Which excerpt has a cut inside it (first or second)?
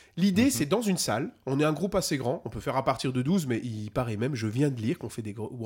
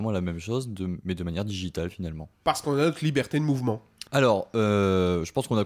second